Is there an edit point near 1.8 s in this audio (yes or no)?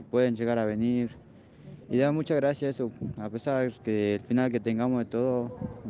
no